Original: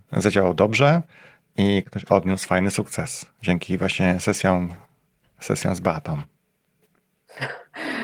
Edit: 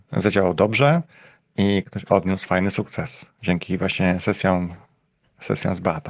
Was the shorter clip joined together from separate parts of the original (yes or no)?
no